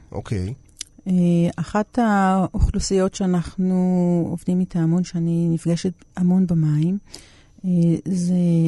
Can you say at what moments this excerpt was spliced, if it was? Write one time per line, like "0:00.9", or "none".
none